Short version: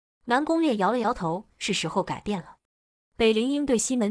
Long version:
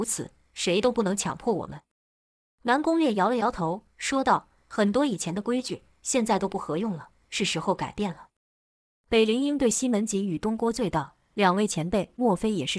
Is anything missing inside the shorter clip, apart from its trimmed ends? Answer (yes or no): yes